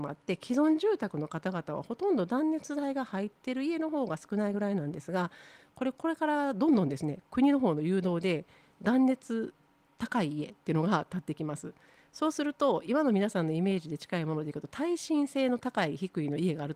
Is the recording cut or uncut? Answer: uncut